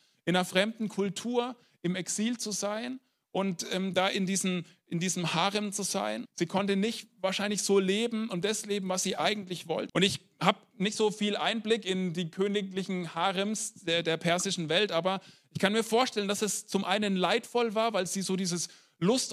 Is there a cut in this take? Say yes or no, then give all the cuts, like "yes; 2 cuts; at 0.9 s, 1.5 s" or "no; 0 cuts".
yes; 2 cuts; at 6.3 s, 9.9 s